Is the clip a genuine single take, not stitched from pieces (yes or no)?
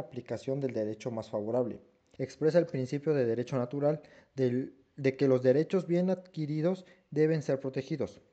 no